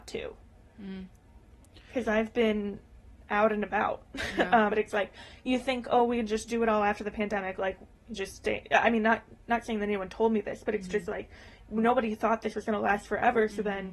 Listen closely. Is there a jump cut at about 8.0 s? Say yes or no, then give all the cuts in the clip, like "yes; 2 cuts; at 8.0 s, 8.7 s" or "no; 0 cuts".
no; 1 cut; at 4.7 s